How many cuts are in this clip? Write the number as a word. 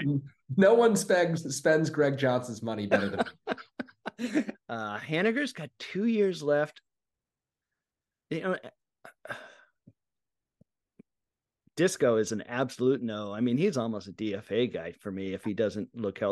one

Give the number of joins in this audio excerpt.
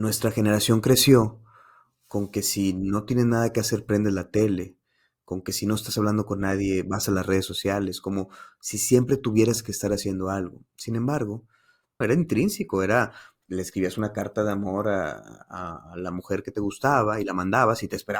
one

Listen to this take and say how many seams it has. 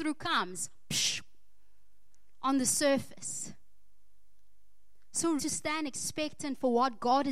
one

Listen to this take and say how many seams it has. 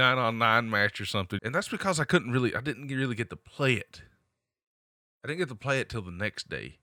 one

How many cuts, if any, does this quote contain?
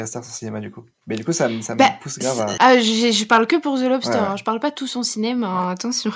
one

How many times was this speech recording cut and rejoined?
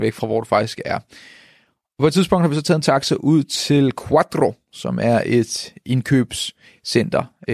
zero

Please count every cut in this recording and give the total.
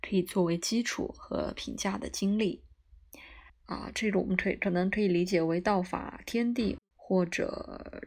two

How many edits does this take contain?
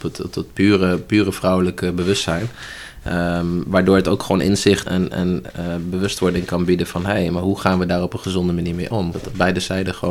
two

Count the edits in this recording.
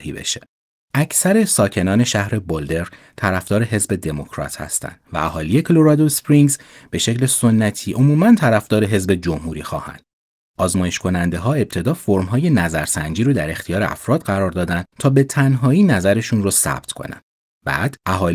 zero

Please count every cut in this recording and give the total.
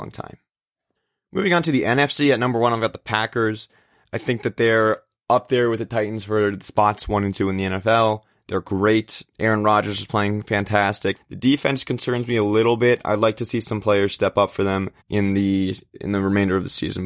two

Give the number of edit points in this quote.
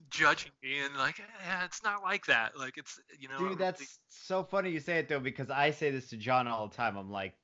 zero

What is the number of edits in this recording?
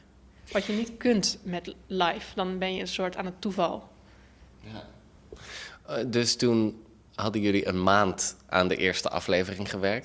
one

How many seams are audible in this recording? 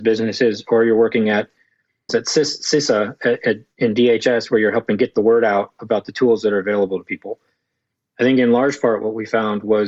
one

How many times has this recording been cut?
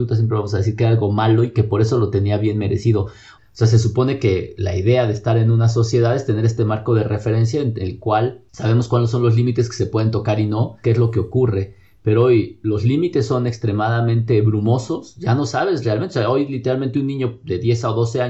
two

